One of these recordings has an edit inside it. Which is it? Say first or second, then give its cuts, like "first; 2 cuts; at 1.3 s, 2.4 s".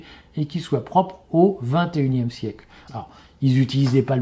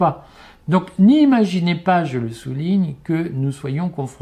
first; 1 cut; at 2.9 s